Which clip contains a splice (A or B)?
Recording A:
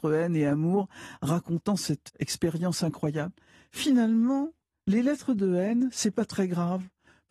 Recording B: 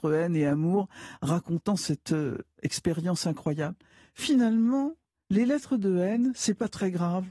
A